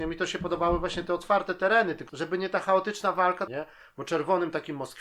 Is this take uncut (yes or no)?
no